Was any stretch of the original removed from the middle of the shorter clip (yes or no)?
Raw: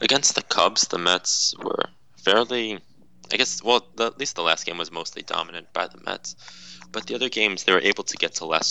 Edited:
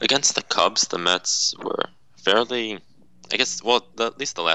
no